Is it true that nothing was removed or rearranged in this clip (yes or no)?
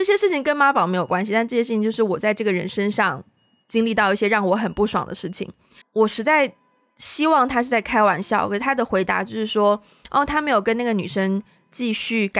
no